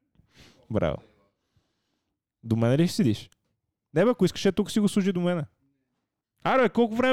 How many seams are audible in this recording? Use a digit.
1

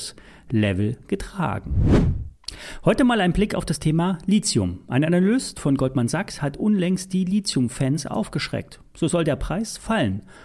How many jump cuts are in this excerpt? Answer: 0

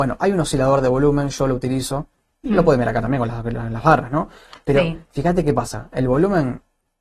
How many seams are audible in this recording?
0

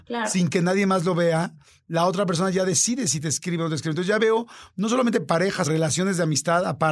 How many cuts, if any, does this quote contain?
1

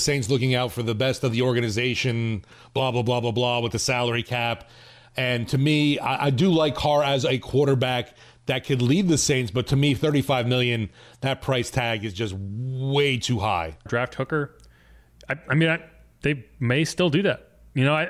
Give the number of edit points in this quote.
1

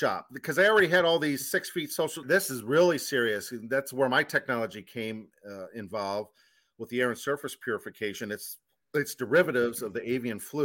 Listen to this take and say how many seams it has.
1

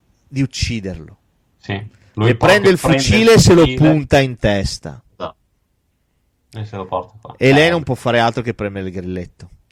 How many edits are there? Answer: 0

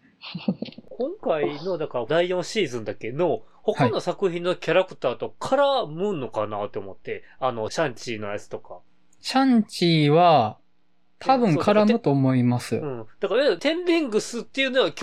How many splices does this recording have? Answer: 0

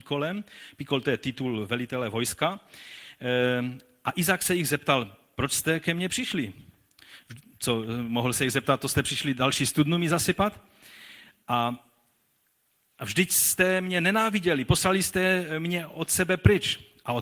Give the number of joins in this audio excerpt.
0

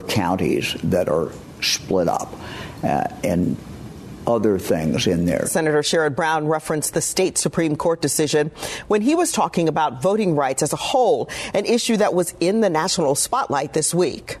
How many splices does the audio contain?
1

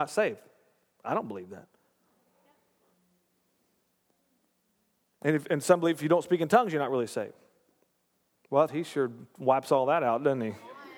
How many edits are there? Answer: 1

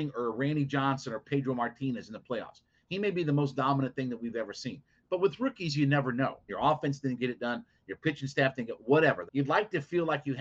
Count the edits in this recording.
2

